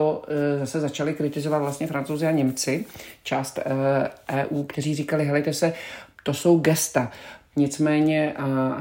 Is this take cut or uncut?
cut